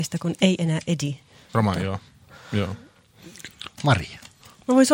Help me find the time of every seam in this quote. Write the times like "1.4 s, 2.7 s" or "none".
1.5 s, 3.7 s